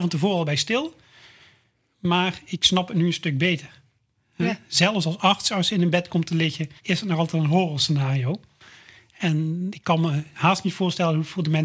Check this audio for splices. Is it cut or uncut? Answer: cut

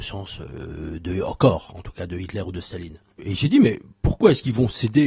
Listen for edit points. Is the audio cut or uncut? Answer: cut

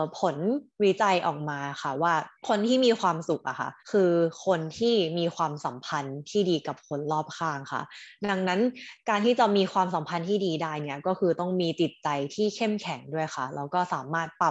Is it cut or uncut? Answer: cut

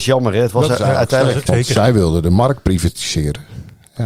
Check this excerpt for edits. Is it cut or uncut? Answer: cut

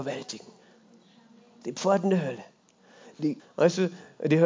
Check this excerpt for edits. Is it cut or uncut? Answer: cut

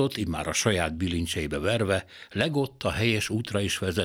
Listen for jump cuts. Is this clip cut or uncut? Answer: uncut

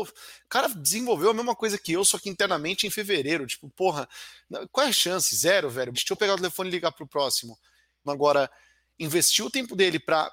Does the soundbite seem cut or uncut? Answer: cut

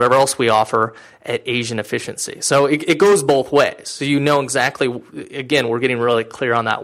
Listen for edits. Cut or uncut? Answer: uncut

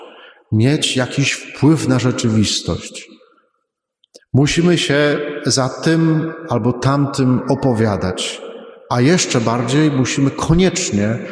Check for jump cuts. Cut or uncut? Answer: uncut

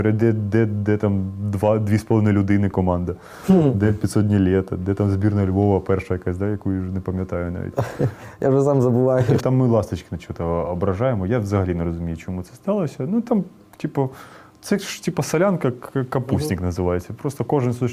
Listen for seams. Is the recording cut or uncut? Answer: cut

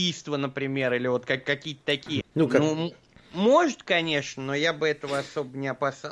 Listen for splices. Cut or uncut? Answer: cut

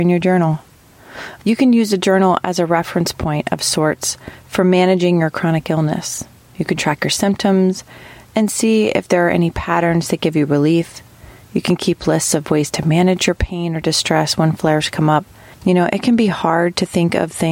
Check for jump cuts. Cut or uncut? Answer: uncut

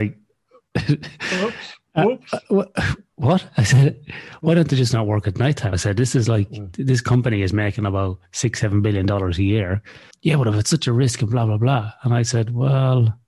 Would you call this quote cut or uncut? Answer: cut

